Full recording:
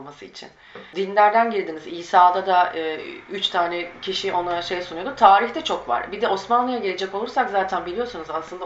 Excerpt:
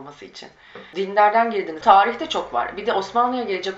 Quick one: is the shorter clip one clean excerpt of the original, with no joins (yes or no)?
no